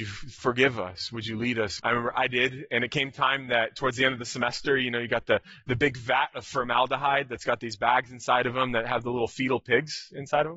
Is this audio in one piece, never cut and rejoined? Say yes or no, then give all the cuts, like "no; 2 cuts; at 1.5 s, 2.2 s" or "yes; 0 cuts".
no; 1 cut; at 1.8 s